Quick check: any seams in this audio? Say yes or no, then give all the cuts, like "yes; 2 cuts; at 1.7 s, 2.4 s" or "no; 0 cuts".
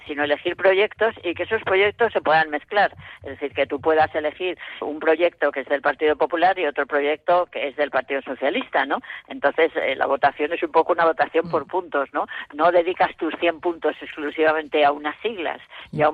yes; 1 cut; at 4.8 s